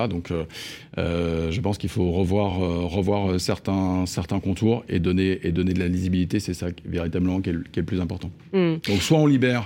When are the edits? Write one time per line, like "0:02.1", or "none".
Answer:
none